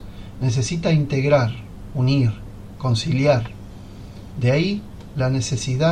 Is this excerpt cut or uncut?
cut